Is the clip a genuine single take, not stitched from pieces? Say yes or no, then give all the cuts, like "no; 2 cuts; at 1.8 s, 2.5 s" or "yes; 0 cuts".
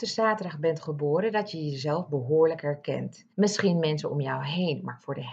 no; 1 cut; at 3.3 s